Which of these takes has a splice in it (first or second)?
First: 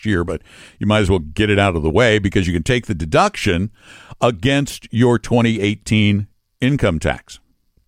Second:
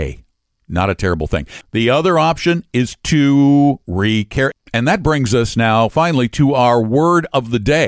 second